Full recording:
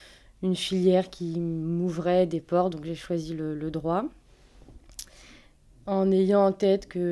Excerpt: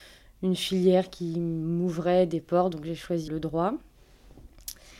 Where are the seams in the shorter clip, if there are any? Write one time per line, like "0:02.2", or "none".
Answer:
0:03.3